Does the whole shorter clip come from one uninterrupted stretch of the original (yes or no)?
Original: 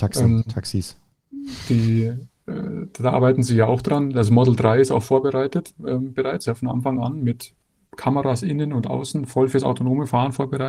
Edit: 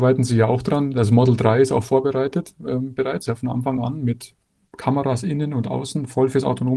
yes